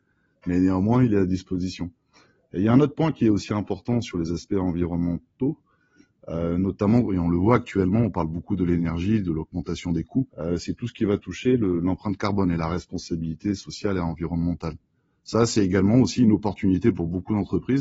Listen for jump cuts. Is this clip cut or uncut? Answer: cut